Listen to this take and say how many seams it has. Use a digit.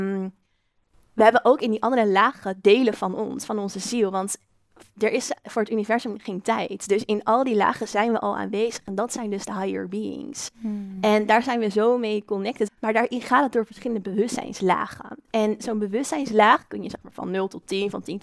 1